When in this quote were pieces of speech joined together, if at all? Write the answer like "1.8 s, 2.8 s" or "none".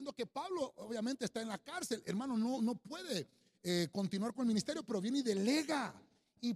none